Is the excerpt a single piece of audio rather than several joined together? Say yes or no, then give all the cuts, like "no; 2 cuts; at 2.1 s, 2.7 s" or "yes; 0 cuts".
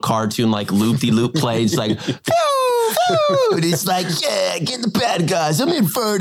yes; 0 cuts